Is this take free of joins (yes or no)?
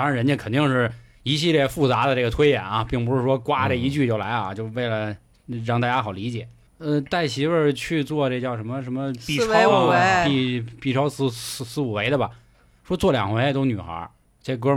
yes